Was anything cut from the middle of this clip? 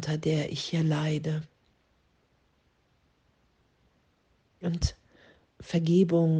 no; 0 cuts

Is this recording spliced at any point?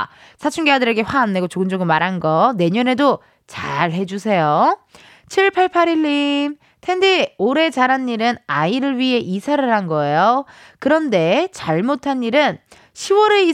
no; 0 cuts

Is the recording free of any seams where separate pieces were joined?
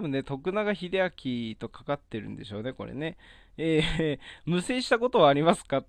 yes; 0 cuts

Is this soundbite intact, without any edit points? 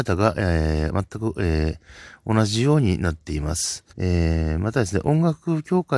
no; 1 cut; at 3.9 s

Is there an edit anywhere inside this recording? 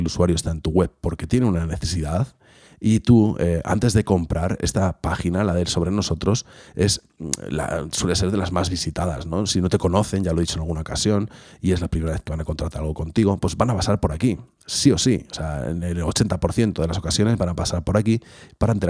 no; 0 cuts

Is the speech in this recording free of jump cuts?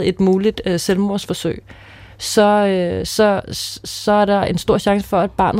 yes; 0 cuts

